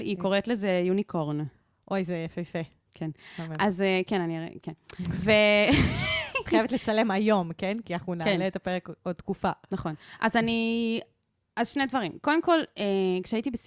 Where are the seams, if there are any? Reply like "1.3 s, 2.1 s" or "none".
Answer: none